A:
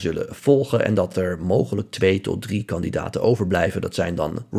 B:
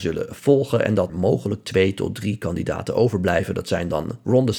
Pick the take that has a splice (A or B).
B